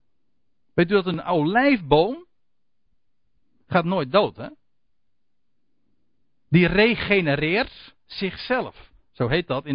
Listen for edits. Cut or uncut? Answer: uncut